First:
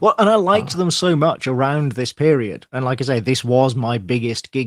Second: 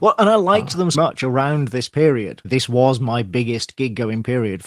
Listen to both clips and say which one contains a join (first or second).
second